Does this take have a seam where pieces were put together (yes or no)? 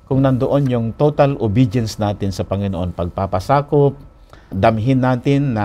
yes